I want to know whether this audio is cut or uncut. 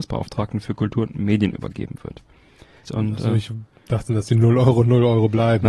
cut